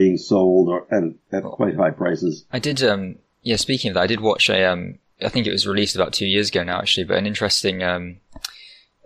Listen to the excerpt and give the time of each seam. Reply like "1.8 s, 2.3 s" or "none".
none